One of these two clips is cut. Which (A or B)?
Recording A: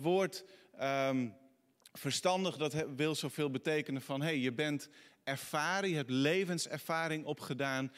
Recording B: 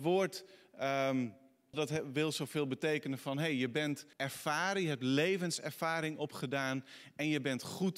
B